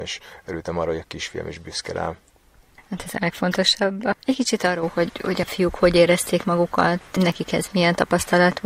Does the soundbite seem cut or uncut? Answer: uncut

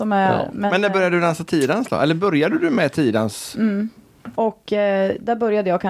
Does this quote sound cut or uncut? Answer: cut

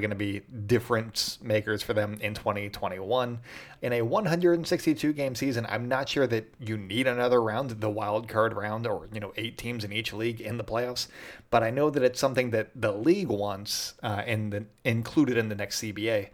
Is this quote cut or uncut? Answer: cut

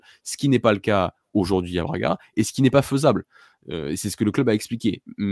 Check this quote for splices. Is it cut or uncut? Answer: uncut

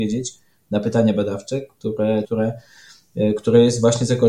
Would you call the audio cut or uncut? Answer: cut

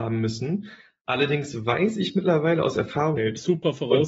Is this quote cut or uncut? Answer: cut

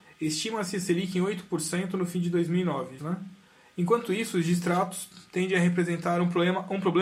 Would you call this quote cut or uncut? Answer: cut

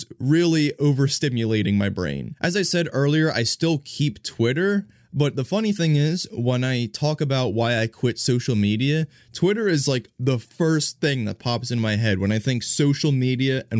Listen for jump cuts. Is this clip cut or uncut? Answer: uncut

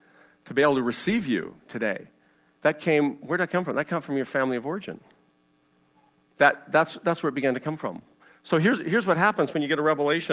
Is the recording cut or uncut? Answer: cut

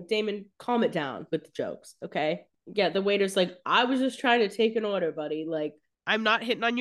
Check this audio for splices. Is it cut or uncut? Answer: cut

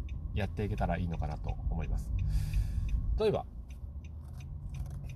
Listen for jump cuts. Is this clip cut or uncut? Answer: cut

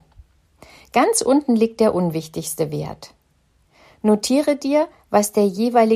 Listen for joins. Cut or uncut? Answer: uncut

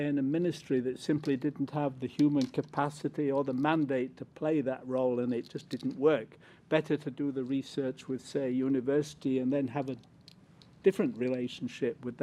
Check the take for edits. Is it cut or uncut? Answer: uncut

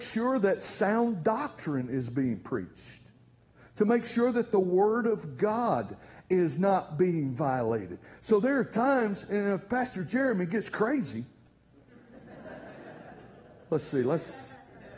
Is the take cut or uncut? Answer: uncut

